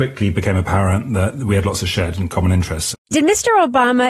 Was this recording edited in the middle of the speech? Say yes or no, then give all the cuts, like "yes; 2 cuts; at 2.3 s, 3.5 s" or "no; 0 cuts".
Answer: yes; 1 cut; at 2.9 s